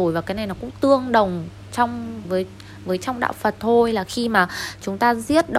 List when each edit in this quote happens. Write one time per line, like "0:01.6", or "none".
0:02.2